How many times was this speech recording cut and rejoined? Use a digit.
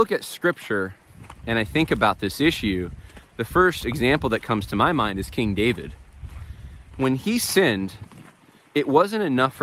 0